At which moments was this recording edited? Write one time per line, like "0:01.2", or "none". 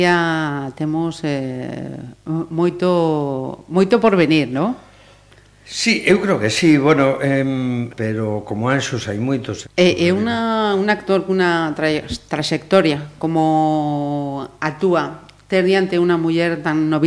0:07.9
0:09.6